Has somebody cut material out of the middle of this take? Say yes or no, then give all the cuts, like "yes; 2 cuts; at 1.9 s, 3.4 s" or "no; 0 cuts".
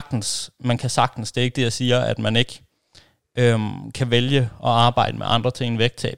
no; 0 cuts